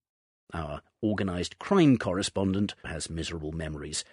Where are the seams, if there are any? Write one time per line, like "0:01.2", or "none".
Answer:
0:02.8